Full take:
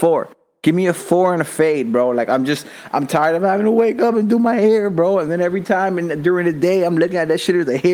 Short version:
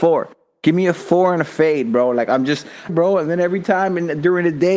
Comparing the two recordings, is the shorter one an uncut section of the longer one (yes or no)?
no